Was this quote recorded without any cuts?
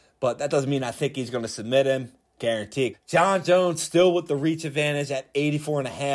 no; 1 cut; at 2.9 s

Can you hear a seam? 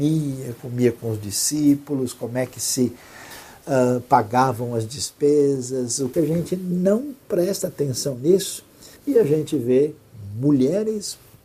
yes; 2 cuts; at 6.1 s, 9.0 s

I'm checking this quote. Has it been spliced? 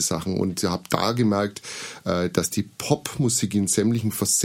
no; 0 cuts

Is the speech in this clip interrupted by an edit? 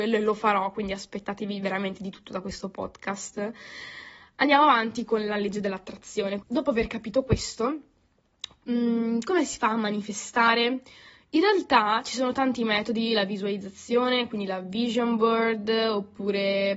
yes; 1 cut; at 6.4 s

